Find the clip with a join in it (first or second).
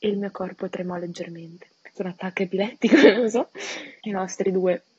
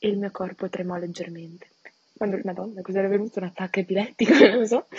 first